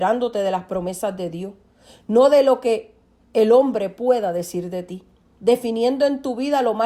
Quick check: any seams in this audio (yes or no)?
no